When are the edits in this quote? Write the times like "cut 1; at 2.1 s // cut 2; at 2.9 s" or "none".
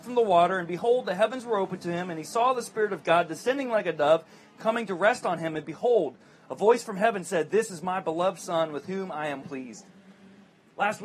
cut 1; at 9.4 s